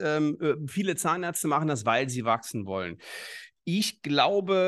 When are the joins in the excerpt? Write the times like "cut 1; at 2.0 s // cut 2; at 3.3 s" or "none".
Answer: none